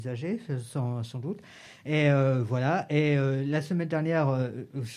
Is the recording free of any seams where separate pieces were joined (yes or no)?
yes